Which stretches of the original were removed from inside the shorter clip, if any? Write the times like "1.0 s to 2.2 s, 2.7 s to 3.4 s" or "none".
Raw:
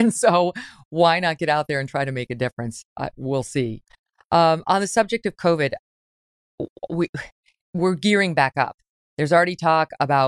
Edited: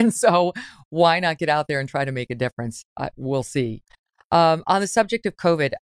none

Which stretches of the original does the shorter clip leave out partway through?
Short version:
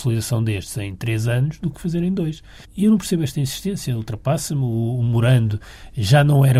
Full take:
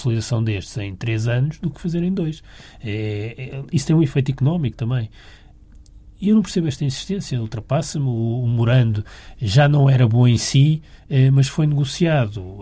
2.6 s to 6.1 s

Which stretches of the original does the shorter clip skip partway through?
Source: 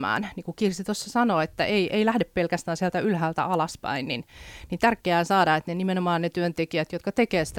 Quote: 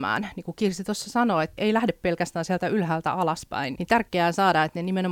1.6 s to 1.9 s, 4.1 s to 4.7 s

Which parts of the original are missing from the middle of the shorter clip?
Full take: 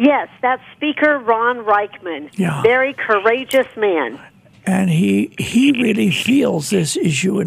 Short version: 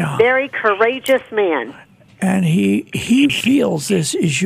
5.7 s to 6.1 s

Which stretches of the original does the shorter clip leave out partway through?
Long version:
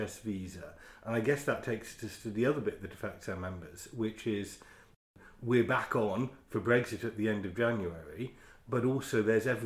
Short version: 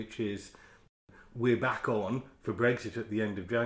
none

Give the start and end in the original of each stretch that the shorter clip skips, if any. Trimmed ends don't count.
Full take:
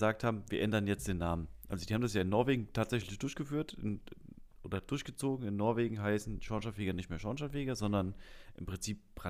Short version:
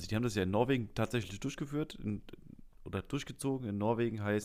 none

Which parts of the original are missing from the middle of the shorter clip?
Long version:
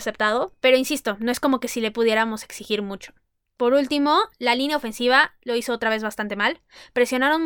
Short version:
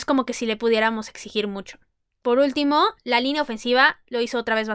none

